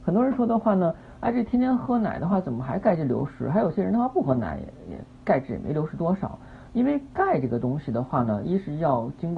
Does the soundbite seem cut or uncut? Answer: uncut